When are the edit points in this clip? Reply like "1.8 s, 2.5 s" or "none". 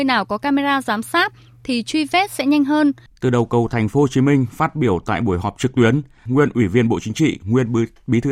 3.1 s, 6.3 s